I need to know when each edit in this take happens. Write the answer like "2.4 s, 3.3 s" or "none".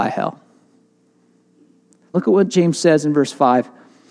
2.1 s